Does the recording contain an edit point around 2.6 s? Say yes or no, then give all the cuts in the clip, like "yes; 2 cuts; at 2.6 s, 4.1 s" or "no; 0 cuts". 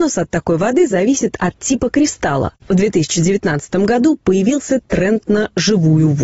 yes; 1 cut; at 2.6 s